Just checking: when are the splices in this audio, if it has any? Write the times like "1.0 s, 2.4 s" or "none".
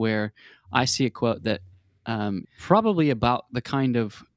2.4 s